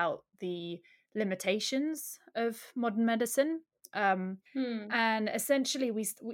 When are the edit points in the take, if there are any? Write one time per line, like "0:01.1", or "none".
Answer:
0:04.5